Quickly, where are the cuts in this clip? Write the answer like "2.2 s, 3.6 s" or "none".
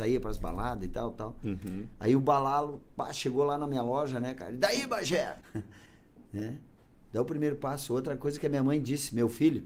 5.4 s